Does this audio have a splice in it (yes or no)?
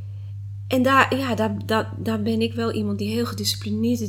no